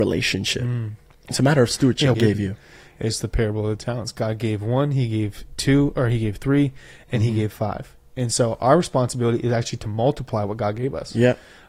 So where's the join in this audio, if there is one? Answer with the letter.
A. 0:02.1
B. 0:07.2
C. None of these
A